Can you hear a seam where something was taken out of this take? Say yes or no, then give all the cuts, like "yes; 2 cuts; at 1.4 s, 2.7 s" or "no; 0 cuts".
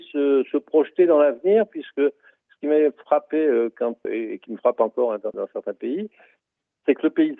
yes; 2 cuts; at 4.0 s, 5.3 s